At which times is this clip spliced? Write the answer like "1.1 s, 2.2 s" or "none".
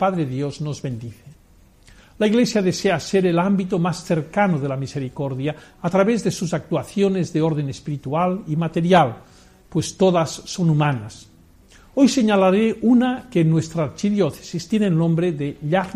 none